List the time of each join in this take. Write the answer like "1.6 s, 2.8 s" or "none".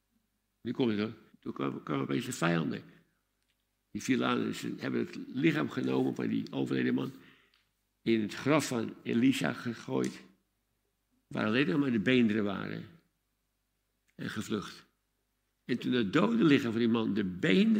1.3 s